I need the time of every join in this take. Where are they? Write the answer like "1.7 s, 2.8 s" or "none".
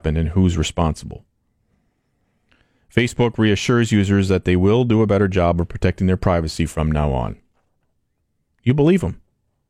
none